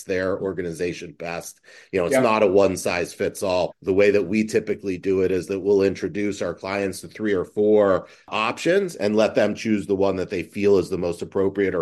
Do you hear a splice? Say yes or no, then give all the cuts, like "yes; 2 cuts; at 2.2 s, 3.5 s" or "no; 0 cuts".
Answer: yes; 1 cut; at 3.7 s